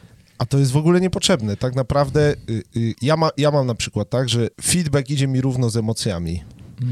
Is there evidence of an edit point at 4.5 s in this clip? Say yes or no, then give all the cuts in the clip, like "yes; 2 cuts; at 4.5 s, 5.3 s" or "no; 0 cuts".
yes; 2 cuts; at 3.0 s, 4.5 s